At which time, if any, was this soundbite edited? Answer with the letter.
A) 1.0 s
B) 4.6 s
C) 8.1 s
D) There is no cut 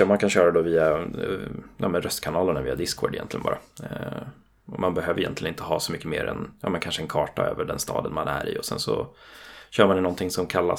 D